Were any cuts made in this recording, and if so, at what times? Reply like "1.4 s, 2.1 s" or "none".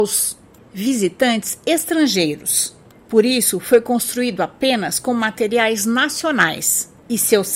none